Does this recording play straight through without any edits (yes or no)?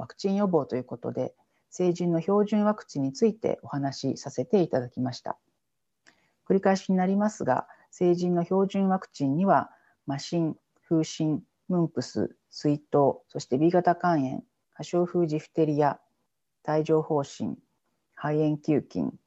yes